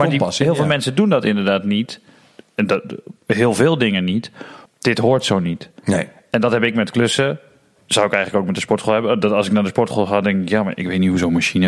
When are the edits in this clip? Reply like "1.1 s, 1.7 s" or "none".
4.7 s